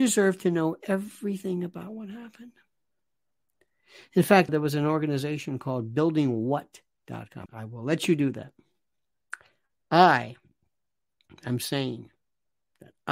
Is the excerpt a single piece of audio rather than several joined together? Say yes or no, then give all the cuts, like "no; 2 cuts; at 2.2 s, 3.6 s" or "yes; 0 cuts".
no; 2 cuts; at 4.5 s, 7.5 s